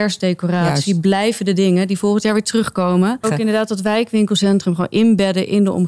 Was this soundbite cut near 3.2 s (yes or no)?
yes